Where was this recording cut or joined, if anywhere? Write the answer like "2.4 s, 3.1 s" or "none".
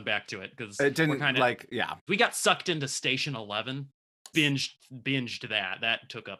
2.1 s, 4.3 s